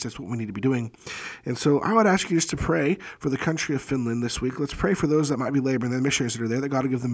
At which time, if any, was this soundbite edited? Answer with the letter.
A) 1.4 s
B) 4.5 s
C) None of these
C